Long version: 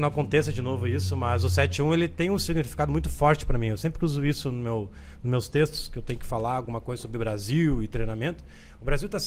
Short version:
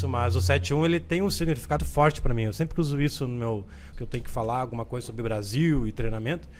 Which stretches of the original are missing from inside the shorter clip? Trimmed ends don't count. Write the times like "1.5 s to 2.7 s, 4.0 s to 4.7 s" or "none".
2.9 s to 3.0 s, 5.2 s to 5.9 s